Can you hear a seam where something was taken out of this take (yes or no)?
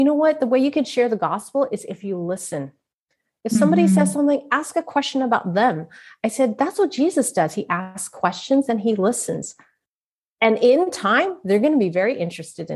no